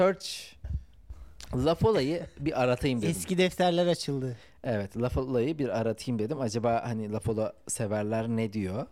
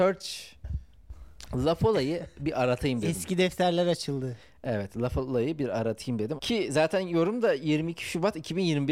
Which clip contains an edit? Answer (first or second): second